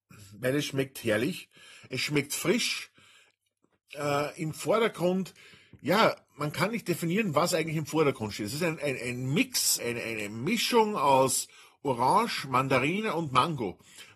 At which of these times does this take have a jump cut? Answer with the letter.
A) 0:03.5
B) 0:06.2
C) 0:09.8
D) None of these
C